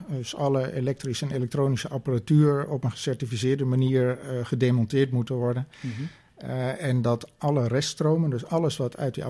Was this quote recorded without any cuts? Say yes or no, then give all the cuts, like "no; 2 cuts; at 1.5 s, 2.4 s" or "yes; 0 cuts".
yes; 0 cuts